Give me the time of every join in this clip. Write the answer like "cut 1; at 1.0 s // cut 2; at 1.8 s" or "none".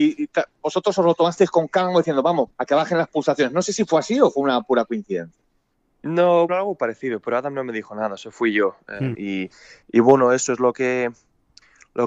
cut 1; at 2.5 s // cut 2; at 6.5 s // cut 3; at 9.1 s